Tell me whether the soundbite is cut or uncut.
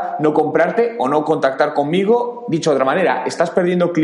uncut